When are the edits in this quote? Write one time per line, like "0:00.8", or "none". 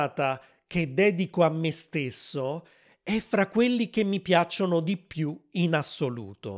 none